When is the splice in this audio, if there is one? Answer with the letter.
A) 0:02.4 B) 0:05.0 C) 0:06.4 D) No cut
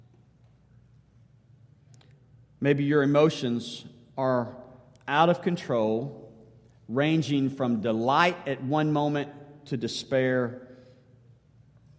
D